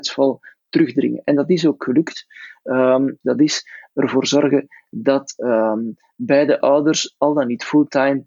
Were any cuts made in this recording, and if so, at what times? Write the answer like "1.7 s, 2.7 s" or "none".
3.2 s

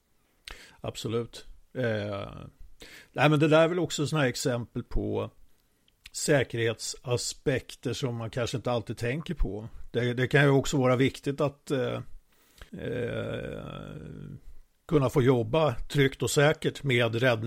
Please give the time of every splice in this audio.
12.7 s

